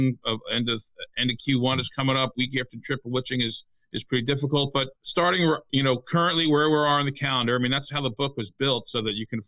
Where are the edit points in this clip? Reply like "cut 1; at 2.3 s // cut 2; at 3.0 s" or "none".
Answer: cut 1; at 5.0 s

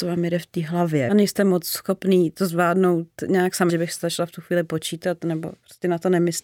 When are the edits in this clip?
cut 1; at 1.1 s // cut 2; at 3.7 s

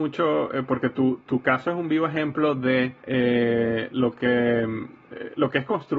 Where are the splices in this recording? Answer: cut 1; at 3.0 s

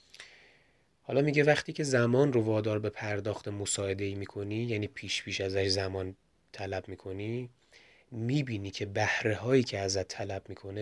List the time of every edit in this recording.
none

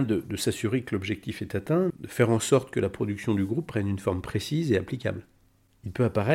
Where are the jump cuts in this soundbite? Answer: cut 1; at 1.9 s

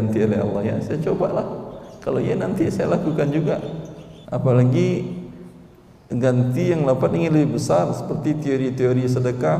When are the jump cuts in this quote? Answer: cut 1; at 4.2 s

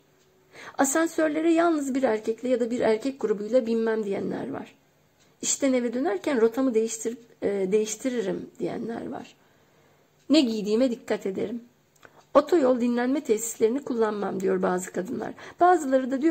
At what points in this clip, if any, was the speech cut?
none

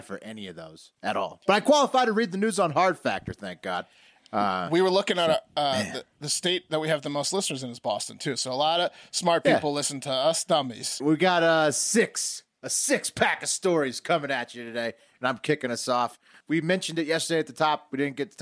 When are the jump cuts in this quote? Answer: cut 1; at 11.0 s // cut 2; at 16.4 s

